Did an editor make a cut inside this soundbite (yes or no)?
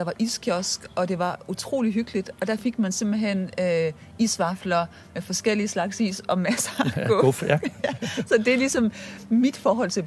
no